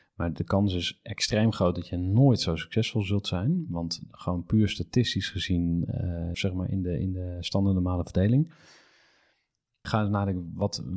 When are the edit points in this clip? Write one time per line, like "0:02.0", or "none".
0:06.3